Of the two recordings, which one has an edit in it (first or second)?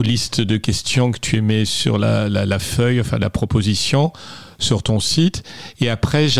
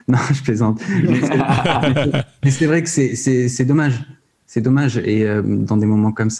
second